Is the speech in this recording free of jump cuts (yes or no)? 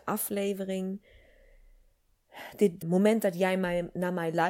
no